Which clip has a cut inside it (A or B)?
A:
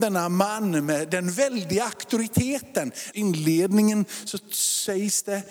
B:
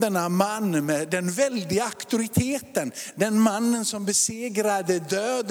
A